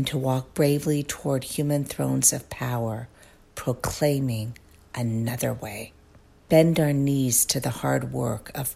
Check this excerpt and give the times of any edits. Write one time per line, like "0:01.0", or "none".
0:06.5